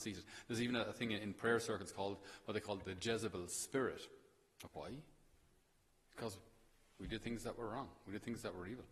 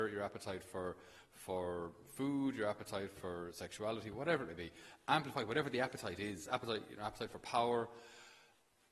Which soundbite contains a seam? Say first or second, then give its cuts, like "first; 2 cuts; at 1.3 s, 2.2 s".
first; 1 cut; at 4.7 s